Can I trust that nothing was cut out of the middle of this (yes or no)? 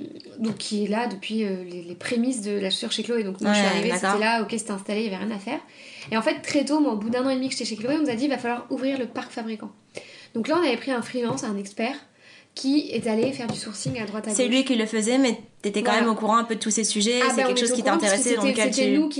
yes